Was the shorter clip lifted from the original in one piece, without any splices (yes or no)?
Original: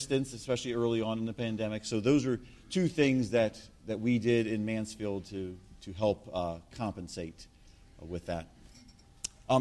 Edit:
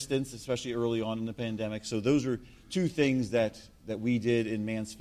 yes